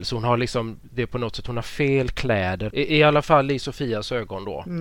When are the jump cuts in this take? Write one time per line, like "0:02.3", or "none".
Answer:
0:02.7